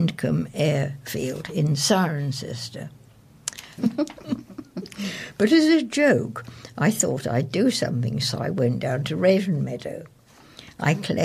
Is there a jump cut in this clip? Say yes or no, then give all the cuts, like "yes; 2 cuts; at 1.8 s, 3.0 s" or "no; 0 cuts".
yes; 1 cut; at 3.8 s